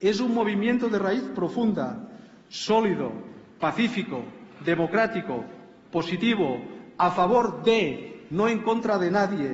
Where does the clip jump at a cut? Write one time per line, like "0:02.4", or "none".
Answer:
none